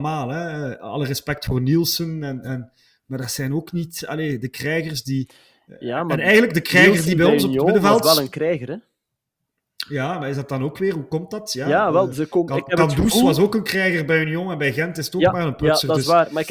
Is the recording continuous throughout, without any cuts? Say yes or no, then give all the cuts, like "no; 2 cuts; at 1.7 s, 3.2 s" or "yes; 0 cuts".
yes; 0 cuts